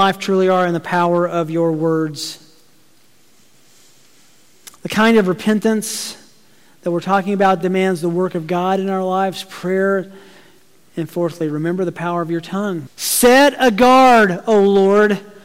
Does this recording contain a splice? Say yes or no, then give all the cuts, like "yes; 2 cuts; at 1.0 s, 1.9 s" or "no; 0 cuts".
yes; 2 cuts; at 10.9 s, 12.9 s